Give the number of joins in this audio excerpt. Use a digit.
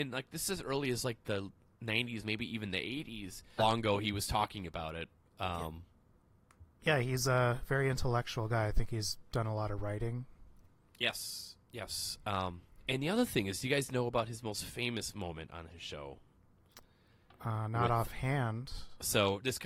1